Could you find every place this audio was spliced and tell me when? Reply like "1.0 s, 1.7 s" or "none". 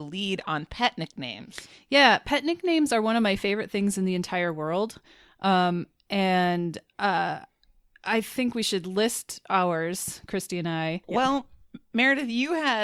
11.0 s